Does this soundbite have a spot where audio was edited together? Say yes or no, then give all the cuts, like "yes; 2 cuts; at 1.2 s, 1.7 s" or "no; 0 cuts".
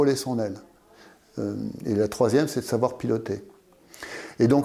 no; 0 cuts